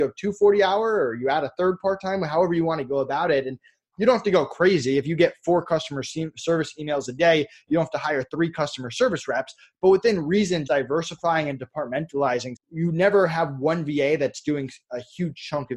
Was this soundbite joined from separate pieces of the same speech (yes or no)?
yes